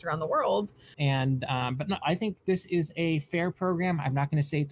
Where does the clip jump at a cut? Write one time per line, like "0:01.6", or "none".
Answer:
0:00.9
0:02.0